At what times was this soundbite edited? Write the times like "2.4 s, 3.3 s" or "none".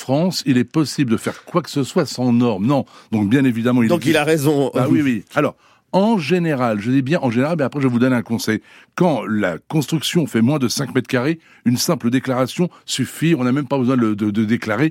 none